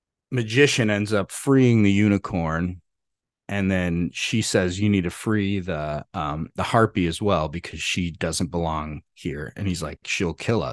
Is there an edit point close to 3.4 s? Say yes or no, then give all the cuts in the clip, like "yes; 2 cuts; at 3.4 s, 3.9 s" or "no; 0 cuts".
no; 0 cuts